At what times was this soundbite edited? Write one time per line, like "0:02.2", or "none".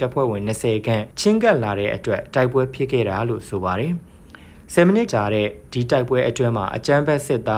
0:01.1
0:05.1